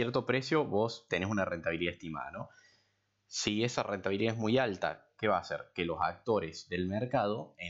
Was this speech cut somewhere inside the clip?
no; 0 cuts

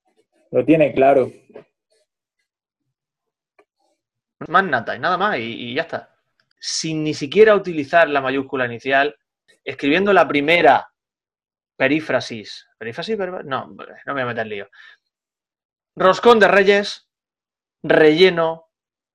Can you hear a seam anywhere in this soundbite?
yes; 3 cuts; at 4.5 s, 6.5 s, 9.5 s

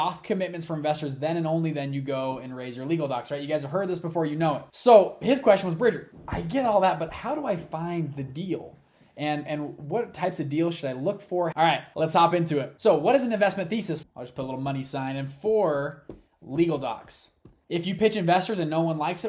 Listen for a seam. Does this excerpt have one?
yes; 3 cuts; at 11.5 s, 14.0 s, 17.6 s

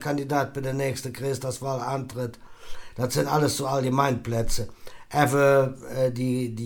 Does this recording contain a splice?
no; 0 cuts

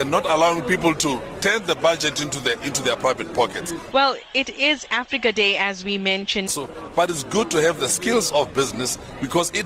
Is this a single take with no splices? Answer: no; 2 cuts; at 3.9 s, 6.5 s

